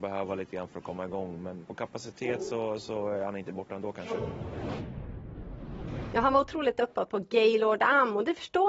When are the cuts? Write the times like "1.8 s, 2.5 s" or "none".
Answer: 1.6 s

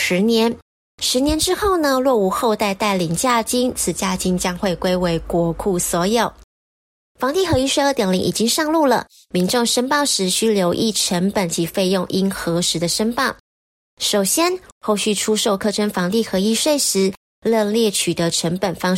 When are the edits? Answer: 7.1 s, 14.7 s

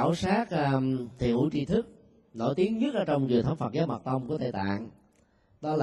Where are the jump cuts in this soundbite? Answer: 1.2 s

